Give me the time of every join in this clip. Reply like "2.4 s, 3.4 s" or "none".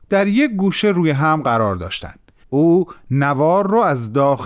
2.4 s